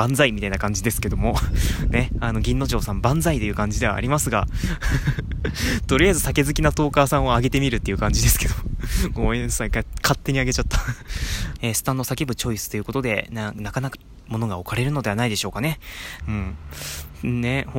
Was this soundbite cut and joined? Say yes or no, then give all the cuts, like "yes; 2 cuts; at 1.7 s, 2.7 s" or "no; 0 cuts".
yes; 3 cuts; at 11.6 s, 13.9 s, 16.2 s